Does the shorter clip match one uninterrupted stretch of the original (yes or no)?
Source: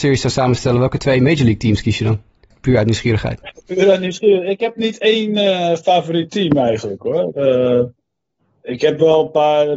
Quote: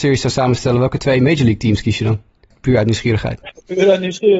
yes